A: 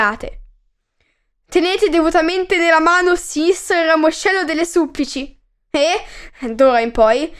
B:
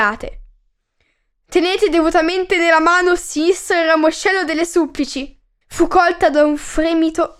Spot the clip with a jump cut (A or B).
B